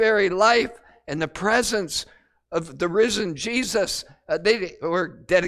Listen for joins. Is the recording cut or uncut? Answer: uncut